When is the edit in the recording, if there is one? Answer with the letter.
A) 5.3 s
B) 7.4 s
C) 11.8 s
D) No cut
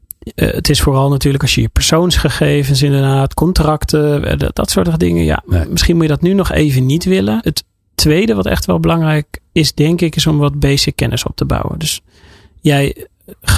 B